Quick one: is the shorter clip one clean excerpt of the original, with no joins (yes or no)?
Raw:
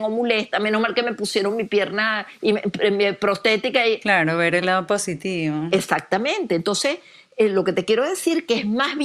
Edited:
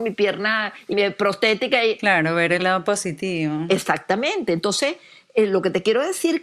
no